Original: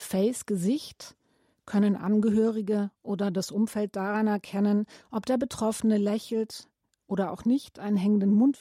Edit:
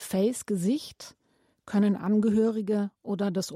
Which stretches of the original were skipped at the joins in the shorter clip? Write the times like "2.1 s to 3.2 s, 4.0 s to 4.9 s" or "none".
none